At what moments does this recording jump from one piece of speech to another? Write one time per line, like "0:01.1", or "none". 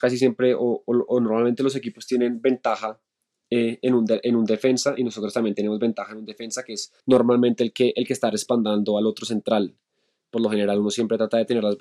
0:07.0